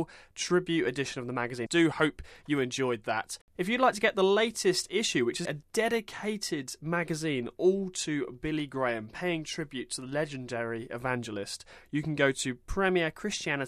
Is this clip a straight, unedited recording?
no; 3 cuts; at 1.7 s, 3.6 s, 5.4 s

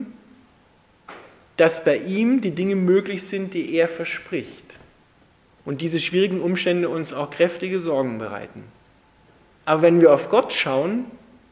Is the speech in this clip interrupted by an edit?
yes; 1 cut; at 5.5 s

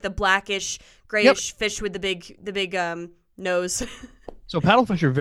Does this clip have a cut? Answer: no; 0 cuts

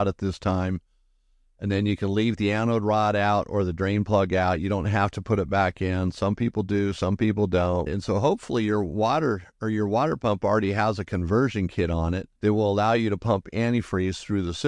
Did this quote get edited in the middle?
yes; 2 cuts; at 7.9 s, 12.4 s

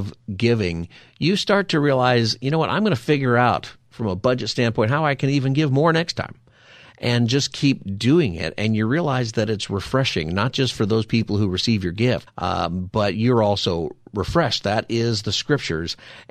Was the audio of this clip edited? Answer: yes; 1 cut; at 12.3 s

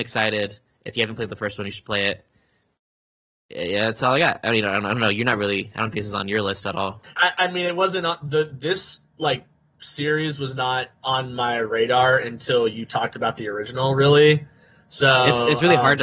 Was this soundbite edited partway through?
yes; 1 cut; at 7.2 s

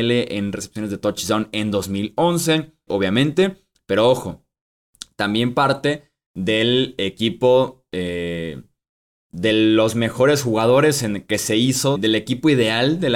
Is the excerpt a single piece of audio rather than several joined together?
no; 2 cuts; at 2.9 s, 11.9 s

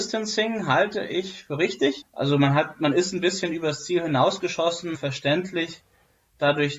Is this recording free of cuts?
no; 2 cuts; at 2.0 s, 4.9 s

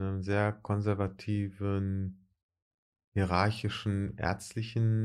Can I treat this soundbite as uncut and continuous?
yes; 0 cuts

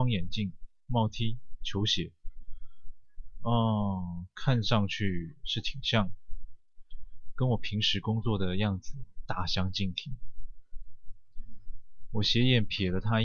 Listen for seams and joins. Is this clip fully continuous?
no; 1 cut; at 1.6 s

